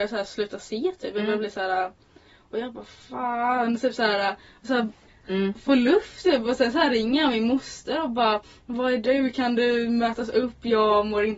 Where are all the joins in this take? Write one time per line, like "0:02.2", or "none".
0:05.1

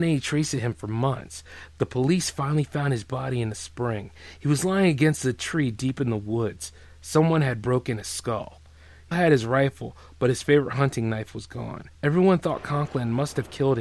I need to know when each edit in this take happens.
0:09.1
0:11.9

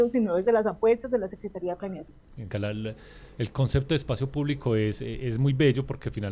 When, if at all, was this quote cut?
0:02.5

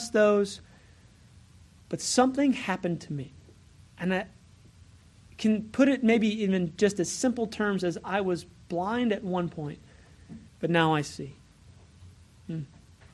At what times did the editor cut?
0:03.8
0:10.5

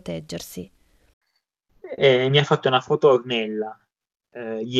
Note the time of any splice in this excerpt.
none

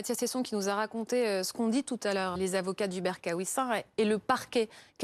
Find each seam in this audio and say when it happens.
0:02.4

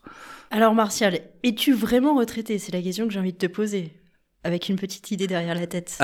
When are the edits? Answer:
none

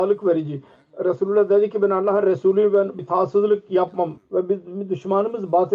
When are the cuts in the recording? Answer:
0:03.0
0:04.2

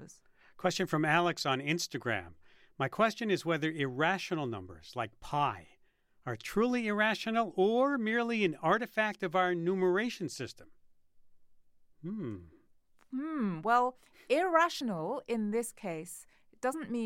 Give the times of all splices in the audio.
none

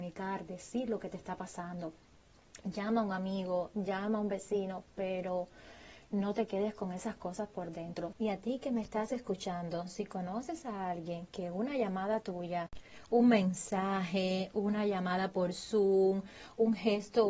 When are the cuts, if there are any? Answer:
0:08.1

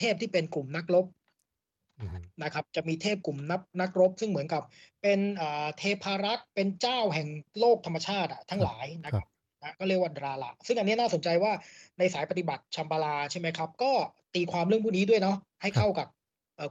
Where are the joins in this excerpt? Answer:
none

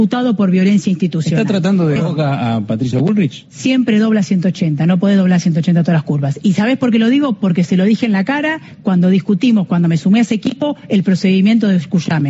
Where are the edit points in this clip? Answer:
0:02.0

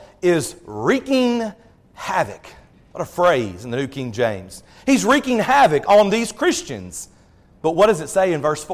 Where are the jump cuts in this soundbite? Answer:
none

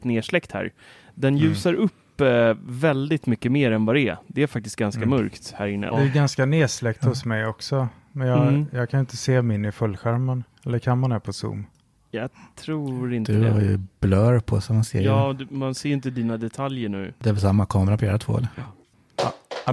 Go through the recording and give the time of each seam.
0:05.9

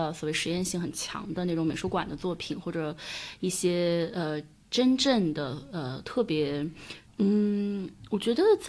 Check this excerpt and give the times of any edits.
0:07.1

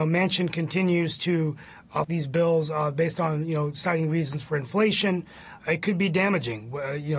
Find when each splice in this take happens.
0:02.0
0:05.6

